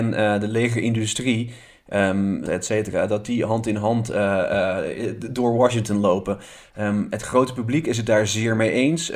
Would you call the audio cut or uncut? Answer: cut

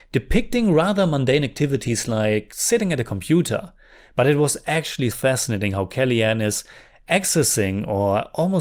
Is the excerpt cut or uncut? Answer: cut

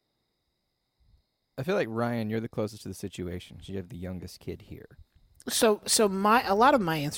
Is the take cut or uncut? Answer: uncut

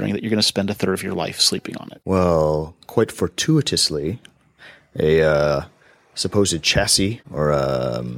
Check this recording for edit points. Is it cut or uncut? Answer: cut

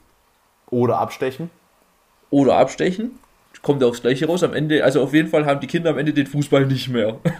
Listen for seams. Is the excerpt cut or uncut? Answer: uncut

